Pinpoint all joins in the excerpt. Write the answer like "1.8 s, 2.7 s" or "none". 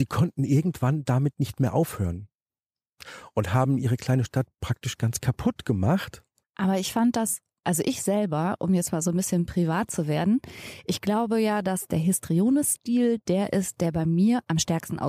6.4 s

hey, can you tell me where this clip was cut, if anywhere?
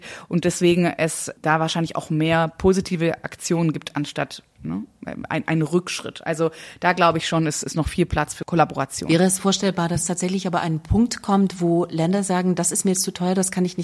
none

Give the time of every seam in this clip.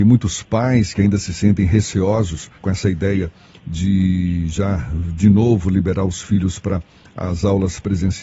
2.6 s

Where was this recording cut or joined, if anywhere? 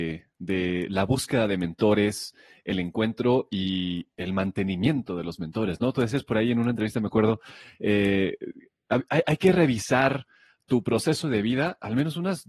none

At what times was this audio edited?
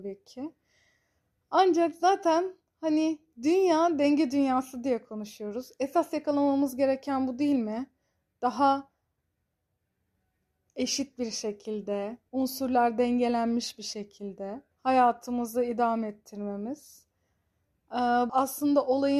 12.3 s, 14.7 s, 18.3 s

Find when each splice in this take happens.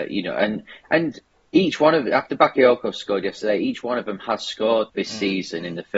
4.9 s

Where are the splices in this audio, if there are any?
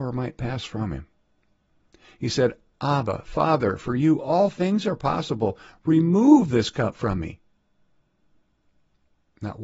none

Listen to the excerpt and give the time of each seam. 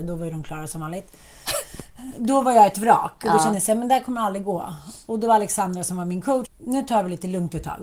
6.4 s

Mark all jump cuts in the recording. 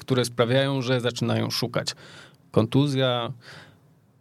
none

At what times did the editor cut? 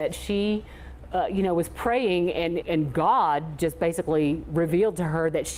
2.6 s

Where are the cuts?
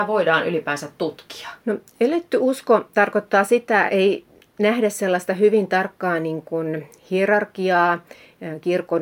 1.6 s, 3.9 s

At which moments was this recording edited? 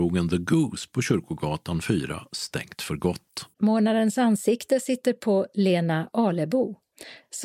3.5 s

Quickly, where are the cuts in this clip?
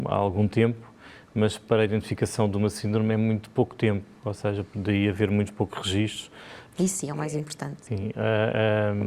6.7 s, 7.9 s

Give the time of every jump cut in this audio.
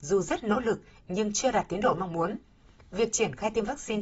none

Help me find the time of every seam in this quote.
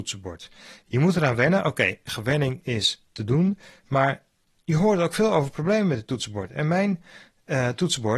none

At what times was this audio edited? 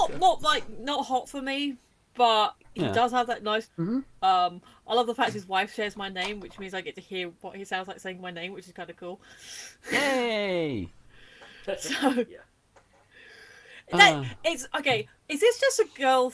3.7 s

